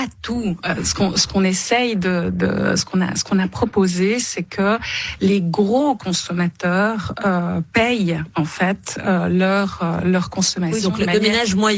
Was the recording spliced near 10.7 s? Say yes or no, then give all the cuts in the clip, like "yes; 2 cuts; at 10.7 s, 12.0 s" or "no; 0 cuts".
no; 0 cuts